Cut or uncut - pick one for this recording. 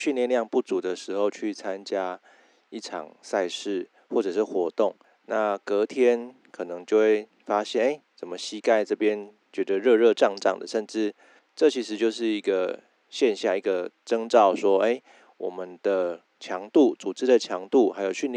cut